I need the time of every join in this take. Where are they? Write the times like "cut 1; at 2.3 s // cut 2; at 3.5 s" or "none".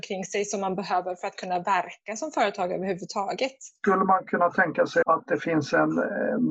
cut 1; at 5.0 s